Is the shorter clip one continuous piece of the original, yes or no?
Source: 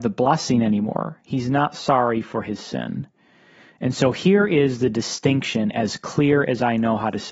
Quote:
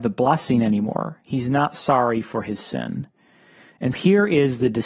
no